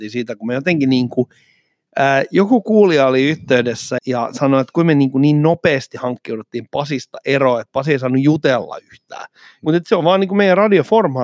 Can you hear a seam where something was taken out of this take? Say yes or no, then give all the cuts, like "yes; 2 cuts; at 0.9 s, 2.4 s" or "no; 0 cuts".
yes; 2 cuts; at 4.0 s, 9.6 s